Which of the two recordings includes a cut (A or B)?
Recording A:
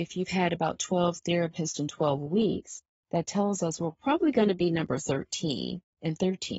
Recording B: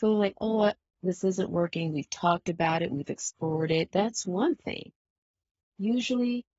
B